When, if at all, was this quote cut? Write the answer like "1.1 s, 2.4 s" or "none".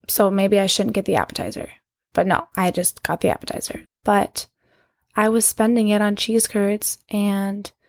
3.8 s